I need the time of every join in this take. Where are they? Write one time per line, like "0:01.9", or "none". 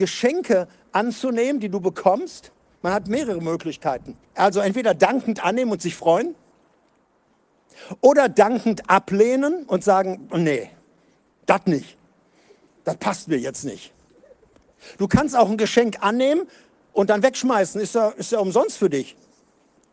0:04.2